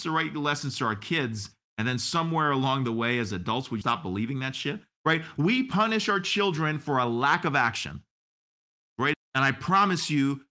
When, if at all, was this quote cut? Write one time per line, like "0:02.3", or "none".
0:03.8
0:09.1